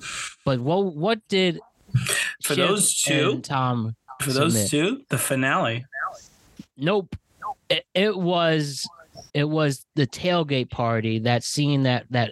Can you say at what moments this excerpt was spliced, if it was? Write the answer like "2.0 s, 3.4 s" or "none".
9.3 s